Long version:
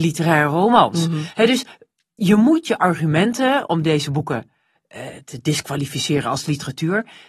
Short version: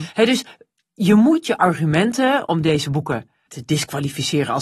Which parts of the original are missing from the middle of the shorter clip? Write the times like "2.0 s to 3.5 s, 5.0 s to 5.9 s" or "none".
4.7 s to 5.2 s